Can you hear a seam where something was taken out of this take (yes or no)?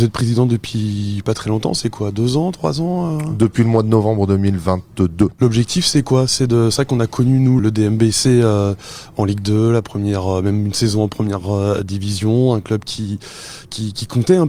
yes